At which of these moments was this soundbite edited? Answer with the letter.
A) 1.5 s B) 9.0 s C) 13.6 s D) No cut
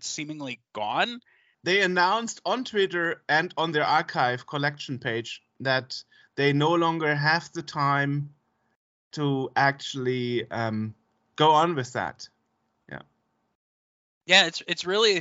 A